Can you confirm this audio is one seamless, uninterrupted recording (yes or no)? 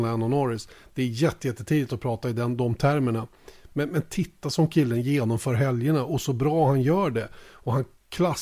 yes